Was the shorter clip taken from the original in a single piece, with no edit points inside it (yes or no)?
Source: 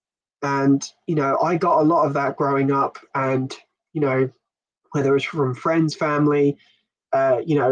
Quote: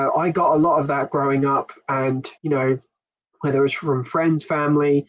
no